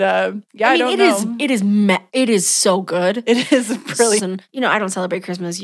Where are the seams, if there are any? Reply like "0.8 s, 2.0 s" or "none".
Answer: 4.2 s